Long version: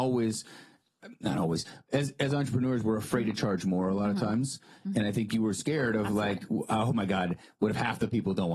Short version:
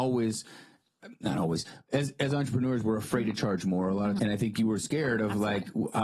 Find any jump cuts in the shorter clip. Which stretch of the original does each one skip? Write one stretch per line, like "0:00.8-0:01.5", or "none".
0:04.2-0:04.9